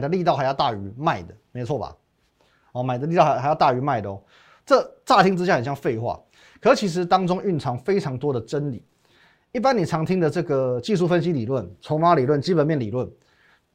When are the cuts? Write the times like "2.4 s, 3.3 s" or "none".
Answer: none